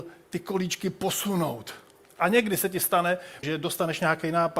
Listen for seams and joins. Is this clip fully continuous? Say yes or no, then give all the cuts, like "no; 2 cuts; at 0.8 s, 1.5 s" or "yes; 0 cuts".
no; 1 cut; at 3.4 s